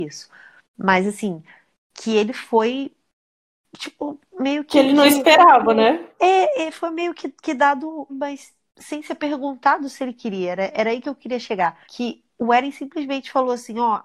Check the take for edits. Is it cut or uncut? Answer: cut